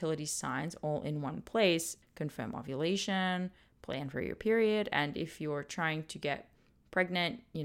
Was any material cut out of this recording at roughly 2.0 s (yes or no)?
yes